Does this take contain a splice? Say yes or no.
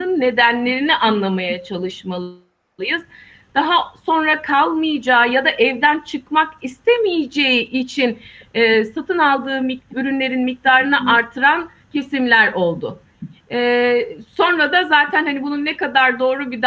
no